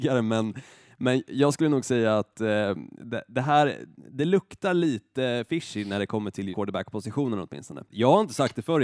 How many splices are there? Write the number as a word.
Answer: two